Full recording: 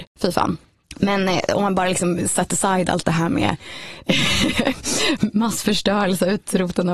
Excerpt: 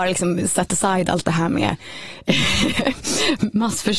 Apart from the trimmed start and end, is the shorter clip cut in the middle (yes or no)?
no